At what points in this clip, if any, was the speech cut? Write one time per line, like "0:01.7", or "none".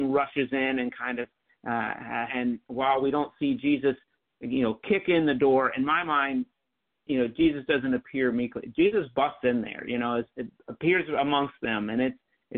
0:02.3